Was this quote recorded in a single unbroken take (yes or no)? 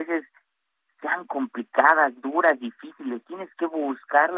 no